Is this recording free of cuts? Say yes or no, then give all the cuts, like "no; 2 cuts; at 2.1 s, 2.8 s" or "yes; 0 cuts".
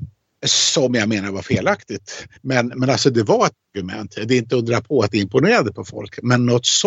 yes; 0 cuts